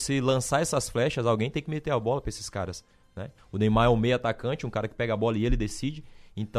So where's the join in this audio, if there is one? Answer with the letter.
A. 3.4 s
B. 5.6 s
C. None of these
A